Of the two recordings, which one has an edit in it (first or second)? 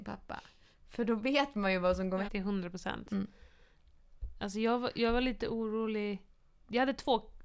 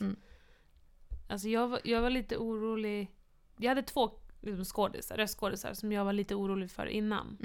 first